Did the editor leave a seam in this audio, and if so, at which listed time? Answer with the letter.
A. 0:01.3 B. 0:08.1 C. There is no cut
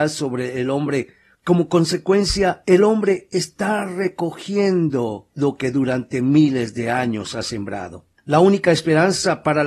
B